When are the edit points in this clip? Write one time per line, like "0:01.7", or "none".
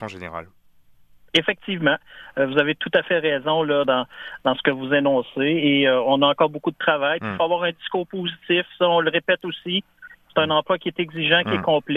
0:03.8